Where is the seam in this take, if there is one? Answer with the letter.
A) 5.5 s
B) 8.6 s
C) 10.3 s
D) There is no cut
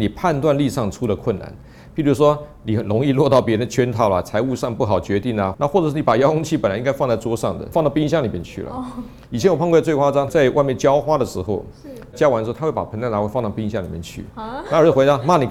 A